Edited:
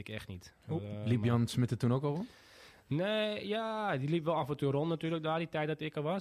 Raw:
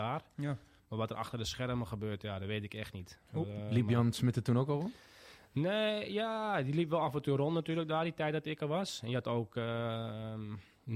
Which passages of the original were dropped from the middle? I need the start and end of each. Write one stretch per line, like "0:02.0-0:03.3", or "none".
none